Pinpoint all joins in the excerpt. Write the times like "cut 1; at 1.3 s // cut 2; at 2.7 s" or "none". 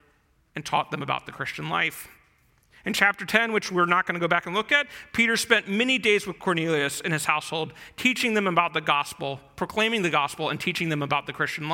cut 1; at 2.7 s